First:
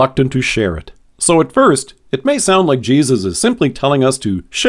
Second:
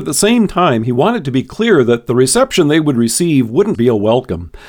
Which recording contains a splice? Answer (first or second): second